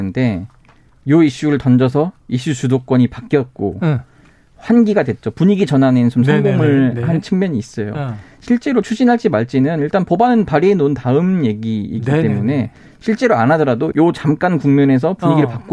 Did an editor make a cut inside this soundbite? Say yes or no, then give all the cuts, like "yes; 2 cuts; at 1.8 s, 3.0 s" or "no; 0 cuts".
yes; 1 cut; at 13.9 s